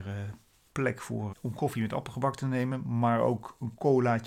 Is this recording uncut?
no; 1 cut; at 1.3 s

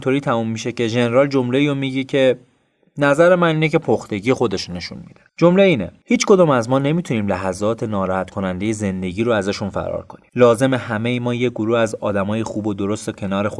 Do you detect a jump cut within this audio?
no; 0 cuts

